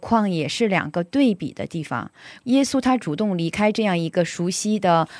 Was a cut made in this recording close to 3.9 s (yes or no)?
no